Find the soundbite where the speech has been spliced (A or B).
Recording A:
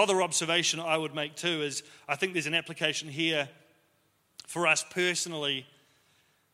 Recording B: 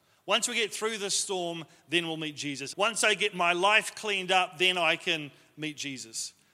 B